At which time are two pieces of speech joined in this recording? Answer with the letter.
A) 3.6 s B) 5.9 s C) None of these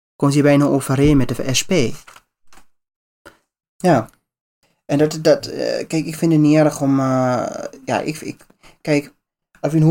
A